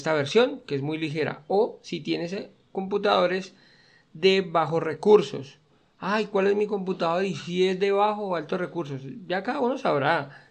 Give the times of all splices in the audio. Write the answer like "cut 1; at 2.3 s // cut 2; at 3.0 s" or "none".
none